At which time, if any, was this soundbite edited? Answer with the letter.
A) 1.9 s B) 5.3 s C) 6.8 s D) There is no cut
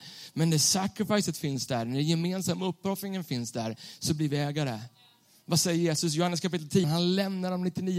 C